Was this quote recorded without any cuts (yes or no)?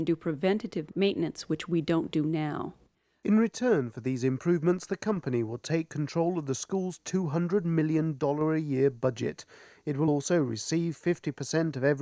yes